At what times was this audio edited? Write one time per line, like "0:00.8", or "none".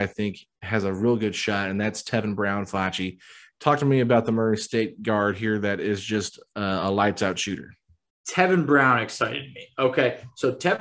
none